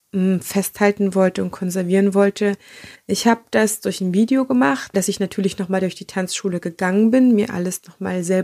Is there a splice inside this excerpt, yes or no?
yes